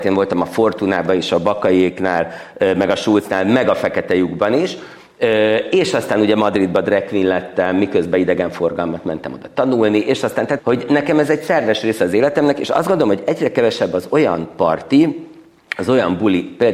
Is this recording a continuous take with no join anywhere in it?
no; 1 cut; at 10.6 s

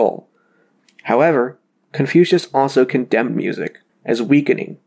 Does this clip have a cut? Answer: yes; 1 cut; at 3.9 s

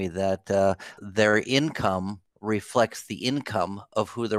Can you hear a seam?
yes; 2 cuts; at 0.9 s, 2.3 s

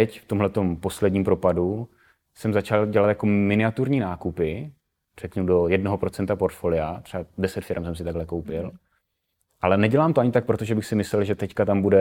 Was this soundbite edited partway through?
no; 0 cuts

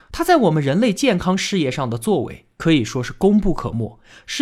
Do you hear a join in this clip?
no; 0 cuts

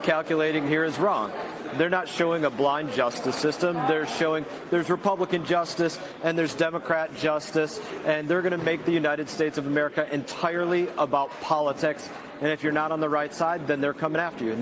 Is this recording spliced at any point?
no; 0 cuts

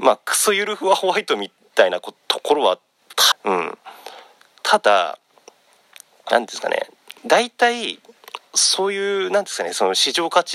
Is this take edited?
yes; 2 cuts; at 3.3 s, 7.2 s

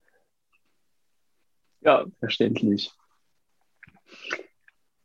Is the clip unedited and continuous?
no; 1 cut; at 2.1 s

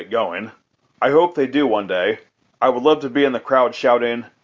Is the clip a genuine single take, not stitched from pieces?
no; 1 cut; at 0.9 s

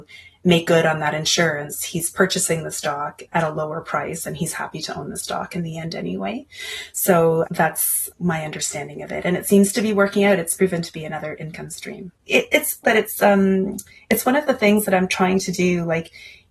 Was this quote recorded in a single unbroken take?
no; 1 cut; at 12.8 s

